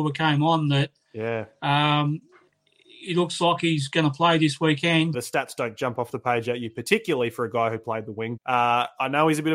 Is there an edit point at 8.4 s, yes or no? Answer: yes